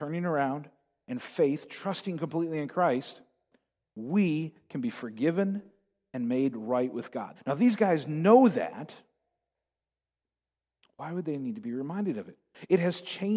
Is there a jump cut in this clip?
yes; 1 cut; at 7.4 s

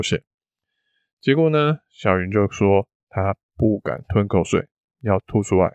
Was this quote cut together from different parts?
no; 0 cuts

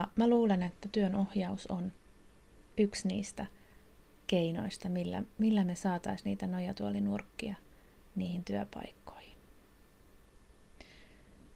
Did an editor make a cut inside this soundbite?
no; 0 cuts

